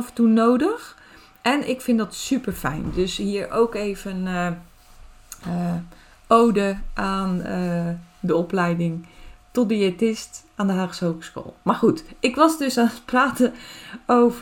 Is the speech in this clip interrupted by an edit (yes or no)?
no